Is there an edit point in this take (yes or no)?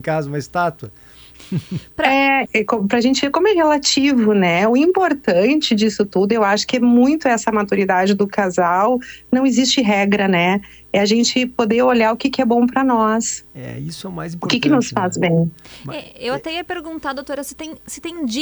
yes